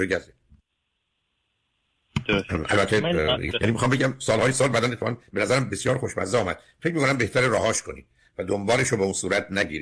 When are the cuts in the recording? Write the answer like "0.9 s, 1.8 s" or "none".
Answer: 3.5 s